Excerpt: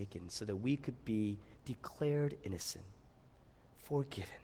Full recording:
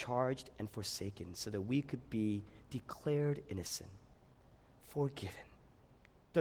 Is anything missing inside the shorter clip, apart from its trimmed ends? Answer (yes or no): no